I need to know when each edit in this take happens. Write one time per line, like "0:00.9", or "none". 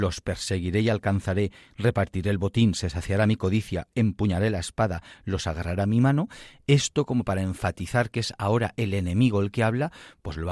none